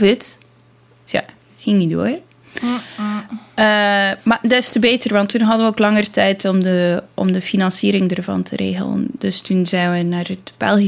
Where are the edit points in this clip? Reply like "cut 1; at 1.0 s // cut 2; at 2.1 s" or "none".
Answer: none